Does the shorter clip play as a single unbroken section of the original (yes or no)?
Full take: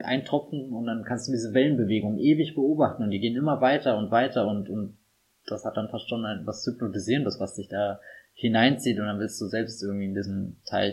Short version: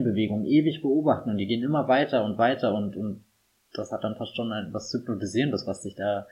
yes